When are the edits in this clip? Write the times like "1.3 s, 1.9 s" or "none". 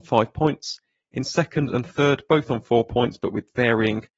none